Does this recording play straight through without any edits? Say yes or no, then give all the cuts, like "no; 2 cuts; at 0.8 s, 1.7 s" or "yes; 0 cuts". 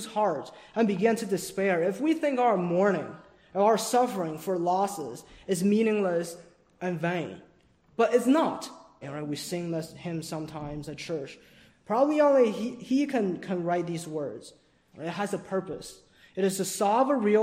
no; 3 cuts; at 9.0 s, 11.7 s, 14.9 s